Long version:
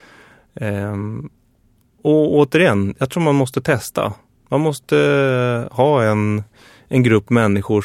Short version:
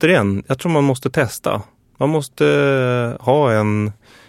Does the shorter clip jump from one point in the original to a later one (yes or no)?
no